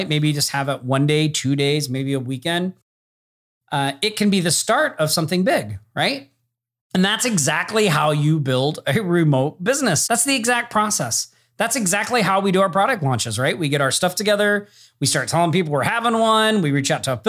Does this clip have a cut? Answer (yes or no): yes